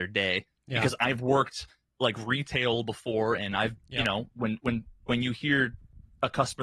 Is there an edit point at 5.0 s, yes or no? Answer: no